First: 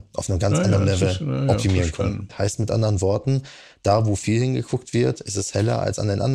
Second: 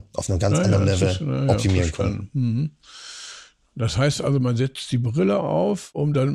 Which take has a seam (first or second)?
first